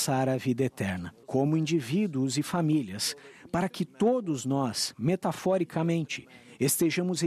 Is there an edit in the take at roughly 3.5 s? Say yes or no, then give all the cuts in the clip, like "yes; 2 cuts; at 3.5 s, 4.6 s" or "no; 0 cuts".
no; 1 cut; at 1.2 s